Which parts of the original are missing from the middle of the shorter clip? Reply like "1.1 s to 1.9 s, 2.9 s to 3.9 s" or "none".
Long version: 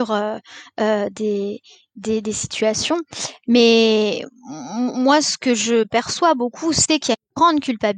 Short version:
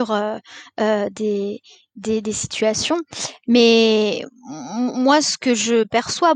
none